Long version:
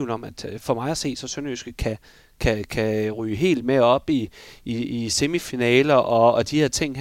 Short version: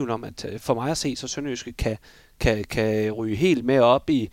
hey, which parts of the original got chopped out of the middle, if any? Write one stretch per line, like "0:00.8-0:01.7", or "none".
none